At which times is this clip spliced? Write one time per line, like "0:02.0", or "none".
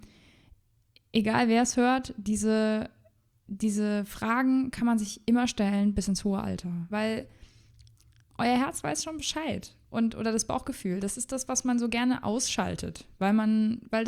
0:06.9